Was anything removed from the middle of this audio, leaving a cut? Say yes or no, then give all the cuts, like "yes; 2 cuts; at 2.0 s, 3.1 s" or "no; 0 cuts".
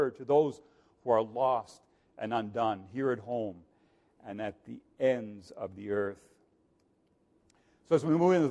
no; 0 cuts